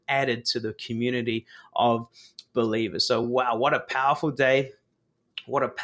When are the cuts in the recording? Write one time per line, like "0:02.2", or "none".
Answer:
none

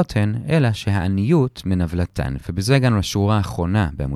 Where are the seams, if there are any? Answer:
none

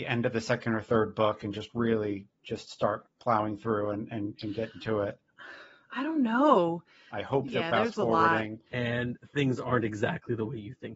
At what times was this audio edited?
0:07.1
0:08.7

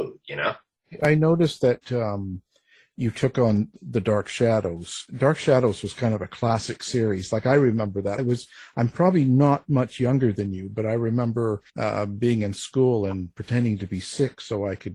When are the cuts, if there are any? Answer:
0:08.2
0:11.7

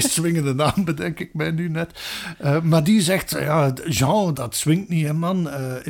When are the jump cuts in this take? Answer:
0:04.3

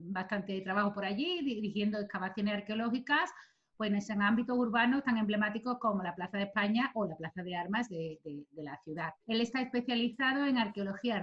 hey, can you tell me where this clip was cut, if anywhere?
0:09.2

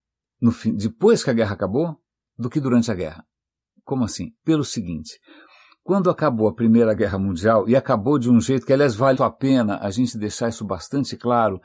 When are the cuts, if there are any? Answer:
0:04.4
0:09.1

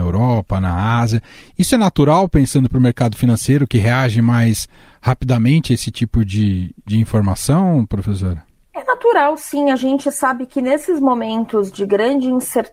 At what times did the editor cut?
none

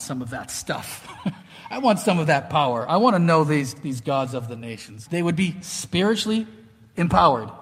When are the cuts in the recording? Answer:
0:05.1

